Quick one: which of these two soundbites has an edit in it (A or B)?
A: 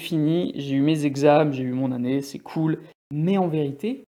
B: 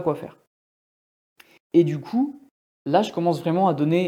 A